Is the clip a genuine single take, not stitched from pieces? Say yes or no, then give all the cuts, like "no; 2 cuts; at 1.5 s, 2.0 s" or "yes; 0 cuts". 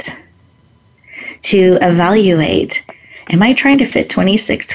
yes; 0 cuts